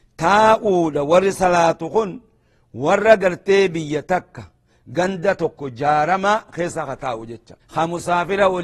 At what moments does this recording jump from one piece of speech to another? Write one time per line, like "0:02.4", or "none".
0:07.6